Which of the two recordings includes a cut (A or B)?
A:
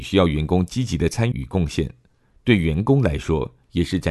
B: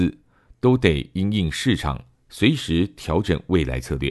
A